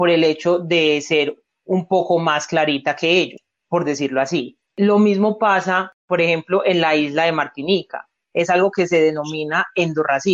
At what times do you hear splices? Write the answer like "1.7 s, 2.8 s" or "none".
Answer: 4.6 s, 8.2 s